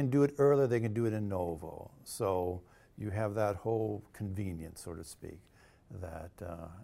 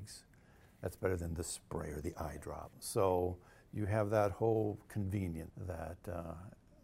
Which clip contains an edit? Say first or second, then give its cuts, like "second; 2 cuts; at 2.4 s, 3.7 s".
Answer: second; 2 cuts; at 2.7 s, 5.5 s